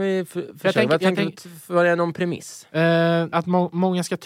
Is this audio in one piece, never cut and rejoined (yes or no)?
no